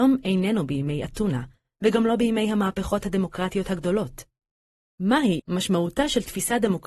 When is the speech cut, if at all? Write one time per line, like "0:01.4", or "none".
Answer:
0:05.4